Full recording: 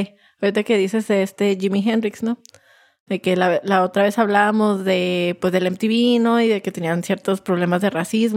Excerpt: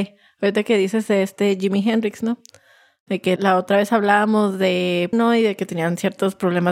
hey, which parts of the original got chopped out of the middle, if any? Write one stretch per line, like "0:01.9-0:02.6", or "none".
0:03.4-0:03.6
0:05.4-0:06.2